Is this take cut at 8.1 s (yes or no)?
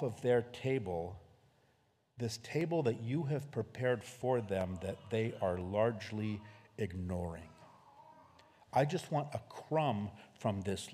no